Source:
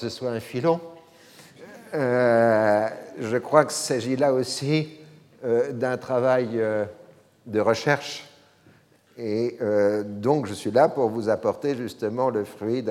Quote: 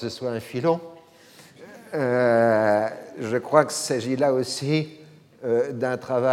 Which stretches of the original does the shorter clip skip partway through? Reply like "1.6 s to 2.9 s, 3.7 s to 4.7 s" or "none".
none